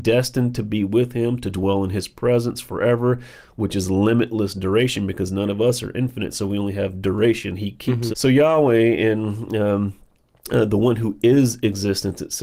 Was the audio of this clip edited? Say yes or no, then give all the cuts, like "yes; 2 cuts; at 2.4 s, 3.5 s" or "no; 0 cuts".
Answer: yes; 1 cut; at 8.1 s